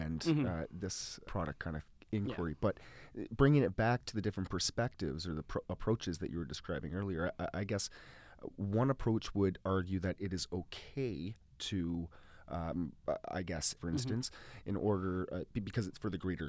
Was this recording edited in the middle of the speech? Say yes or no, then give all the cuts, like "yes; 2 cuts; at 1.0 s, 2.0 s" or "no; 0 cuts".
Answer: yes; 2 cuts; at 1.2 s, 13.8 s